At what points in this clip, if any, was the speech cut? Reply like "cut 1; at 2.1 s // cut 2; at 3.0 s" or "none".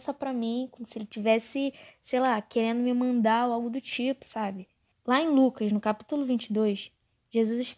cut 1; at 4.9 s